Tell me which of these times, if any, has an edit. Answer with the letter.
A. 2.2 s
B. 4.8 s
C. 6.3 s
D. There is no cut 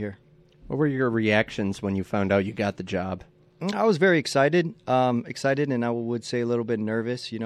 D